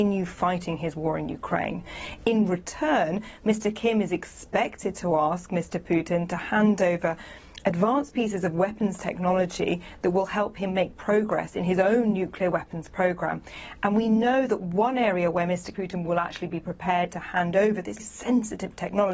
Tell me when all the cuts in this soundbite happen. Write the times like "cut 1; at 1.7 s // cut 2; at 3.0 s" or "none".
cut 1; at 15.7 s // cut 2; at 18.0 s

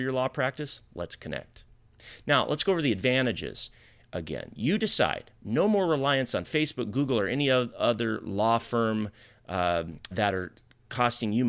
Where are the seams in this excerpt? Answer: cut 1; at 10.1 s

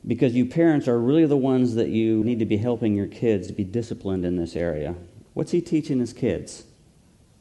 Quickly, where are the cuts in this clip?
cut 1; at 2.2 s // cut 2; at 5.3 s

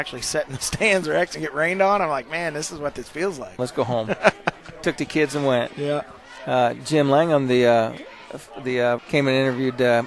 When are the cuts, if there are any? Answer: cut 1; at 3.6 s // cut 2; at 9.0 s

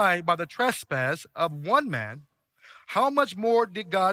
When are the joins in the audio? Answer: none

